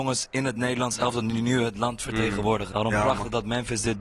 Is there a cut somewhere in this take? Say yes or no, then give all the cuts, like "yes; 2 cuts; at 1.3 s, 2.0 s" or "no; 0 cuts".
yes; 1 cut; at 2.7 s